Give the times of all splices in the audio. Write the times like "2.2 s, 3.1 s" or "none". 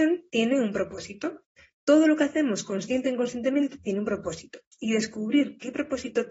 none